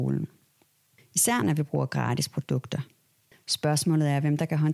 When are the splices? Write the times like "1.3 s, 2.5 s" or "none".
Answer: 1.0 s, 3.3 s